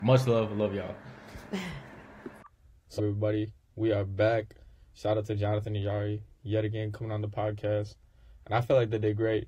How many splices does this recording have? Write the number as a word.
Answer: one